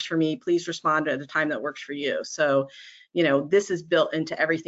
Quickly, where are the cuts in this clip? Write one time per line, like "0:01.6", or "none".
none